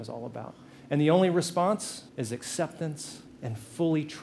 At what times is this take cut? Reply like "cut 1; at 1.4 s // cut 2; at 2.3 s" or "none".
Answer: cut 1; at 2.1 s // cut 2; at 3.3 s